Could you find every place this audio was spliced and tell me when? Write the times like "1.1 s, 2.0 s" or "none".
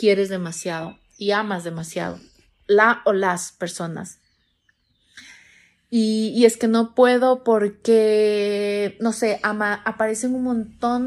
none